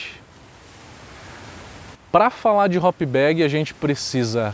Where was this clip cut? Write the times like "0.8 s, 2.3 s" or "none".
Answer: 1.9 s